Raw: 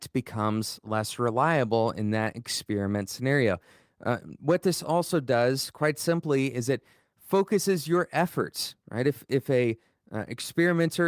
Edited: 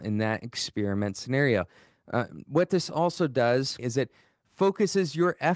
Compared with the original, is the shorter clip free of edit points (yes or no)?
no